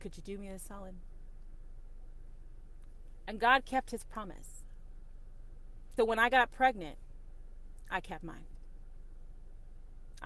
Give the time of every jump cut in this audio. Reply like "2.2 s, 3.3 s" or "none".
6.0 s